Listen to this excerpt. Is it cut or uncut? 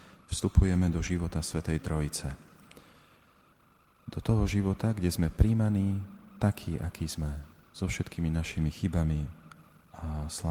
uncut